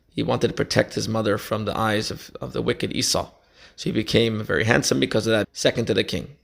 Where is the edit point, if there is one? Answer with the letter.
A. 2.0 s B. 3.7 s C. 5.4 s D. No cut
C